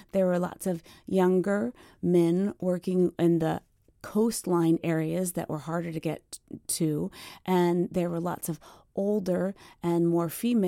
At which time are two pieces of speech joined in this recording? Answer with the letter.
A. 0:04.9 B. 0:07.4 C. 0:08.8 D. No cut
D